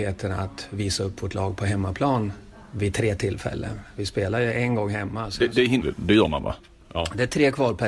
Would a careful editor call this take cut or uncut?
cut